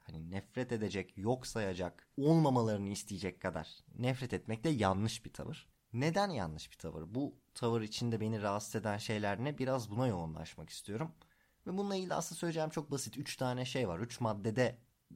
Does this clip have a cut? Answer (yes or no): no